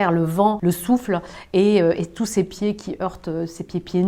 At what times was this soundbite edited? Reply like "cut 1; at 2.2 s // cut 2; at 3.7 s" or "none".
none